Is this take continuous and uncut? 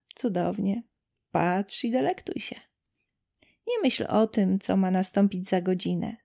yes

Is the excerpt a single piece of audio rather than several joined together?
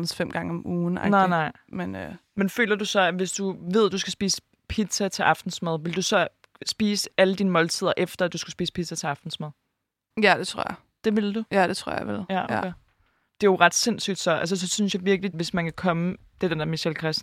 no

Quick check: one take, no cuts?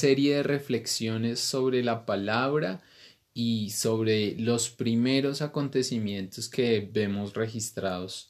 yes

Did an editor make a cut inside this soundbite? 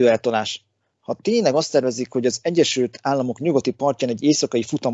no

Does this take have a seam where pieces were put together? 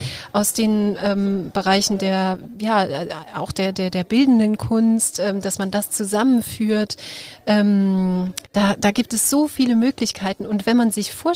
yes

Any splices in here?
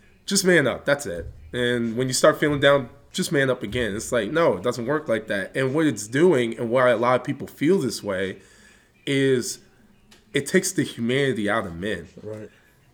no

